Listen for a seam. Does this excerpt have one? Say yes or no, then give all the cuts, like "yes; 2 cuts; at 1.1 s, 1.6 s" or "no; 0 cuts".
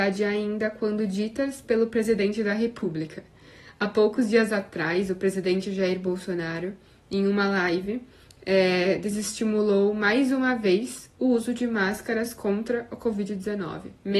no; 0 cuts